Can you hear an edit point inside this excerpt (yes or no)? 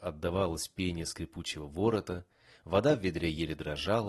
no